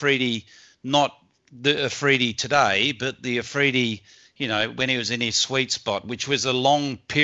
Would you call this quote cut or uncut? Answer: uncut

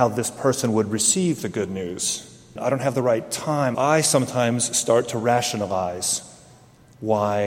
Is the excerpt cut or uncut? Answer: cut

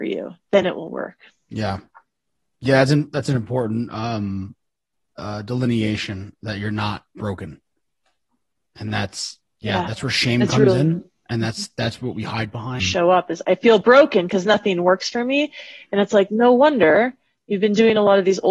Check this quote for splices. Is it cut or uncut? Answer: cut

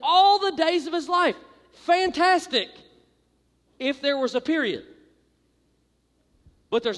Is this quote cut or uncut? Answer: uncut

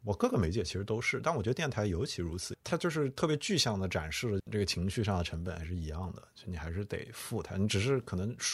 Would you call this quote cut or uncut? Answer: cut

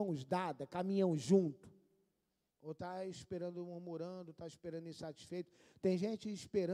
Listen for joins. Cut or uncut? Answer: cut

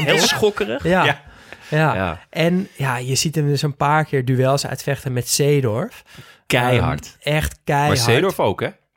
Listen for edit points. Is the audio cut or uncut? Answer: uncut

